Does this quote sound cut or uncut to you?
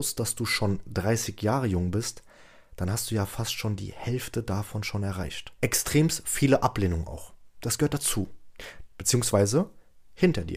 cut